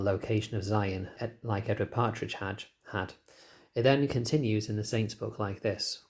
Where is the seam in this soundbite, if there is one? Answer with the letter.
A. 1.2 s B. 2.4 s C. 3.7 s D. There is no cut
A